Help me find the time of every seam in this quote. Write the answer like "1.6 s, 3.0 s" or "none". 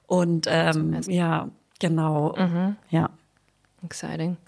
1.0 s, 2.3 s